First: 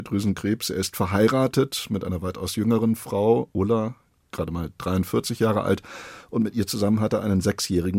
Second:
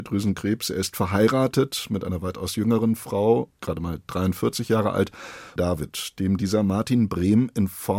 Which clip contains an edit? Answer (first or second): second